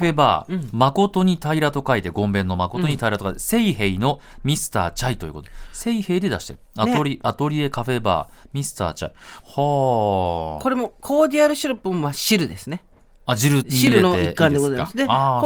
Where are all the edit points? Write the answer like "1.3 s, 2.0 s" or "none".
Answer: 9.4 s, 13.6 s